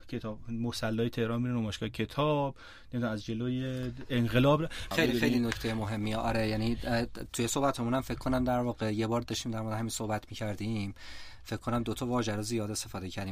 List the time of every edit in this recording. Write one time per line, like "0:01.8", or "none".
0:04.9